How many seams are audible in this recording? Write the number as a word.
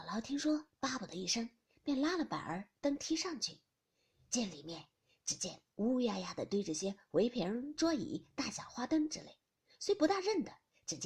zero